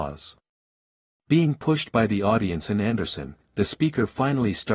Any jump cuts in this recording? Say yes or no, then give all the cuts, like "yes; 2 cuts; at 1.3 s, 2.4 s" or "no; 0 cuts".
no; 0 cuts